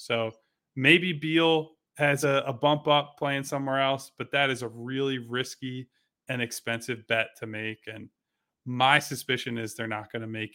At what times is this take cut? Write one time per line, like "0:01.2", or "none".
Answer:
none